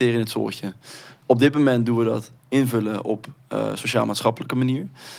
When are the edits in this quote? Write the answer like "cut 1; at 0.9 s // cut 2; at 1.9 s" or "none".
none